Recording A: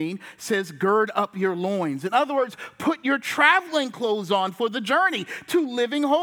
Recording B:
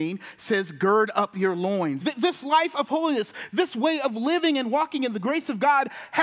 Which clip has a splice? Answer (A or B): B